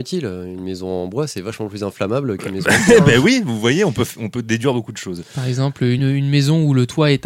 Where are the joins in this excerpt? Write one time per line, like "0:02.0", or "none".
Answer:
0:06.0